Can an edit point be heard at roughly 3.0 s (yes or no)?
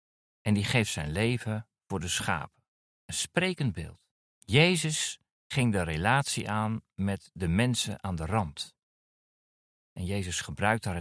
yes